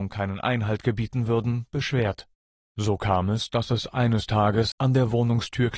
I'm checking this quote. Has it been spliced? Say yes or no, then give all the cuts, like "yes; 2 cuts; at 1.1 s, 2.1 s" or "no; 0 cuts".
yes; 1 cut; at 4.7 s